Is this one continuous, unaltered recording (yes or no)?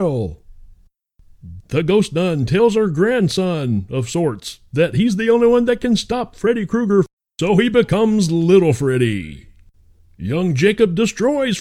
no